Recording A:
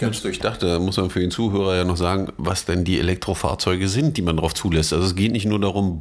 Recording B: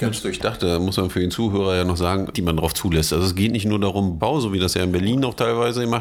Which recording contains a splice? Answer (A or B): B